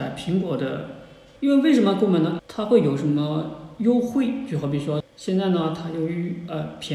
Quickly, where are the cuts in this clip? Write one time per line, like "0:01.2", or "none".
0:01.4
0:02.4
0:05.0